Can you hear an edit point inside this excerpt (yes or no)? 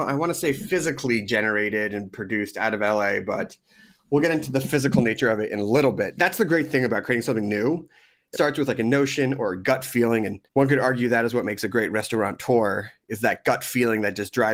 yes